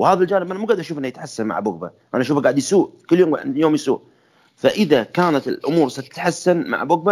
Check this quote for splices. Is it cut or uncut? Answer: uncut